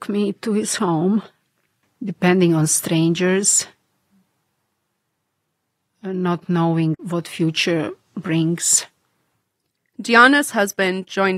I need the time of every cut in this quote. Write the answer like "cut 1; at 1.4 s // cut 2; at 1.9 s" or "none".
cut 1; at 1.8 s